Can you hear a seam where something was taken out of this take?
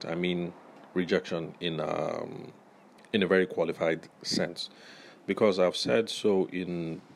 no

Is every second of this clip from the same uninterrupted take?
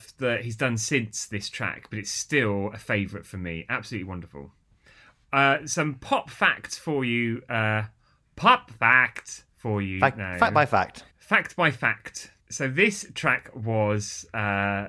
no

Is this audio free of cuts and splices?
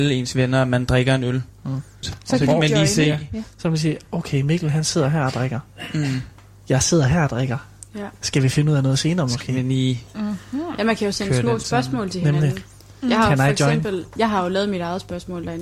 no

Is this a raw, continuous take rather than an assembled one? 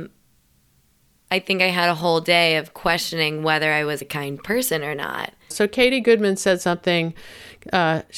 no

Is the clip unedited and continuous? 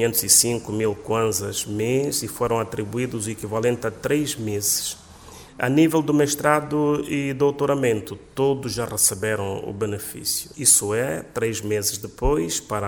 no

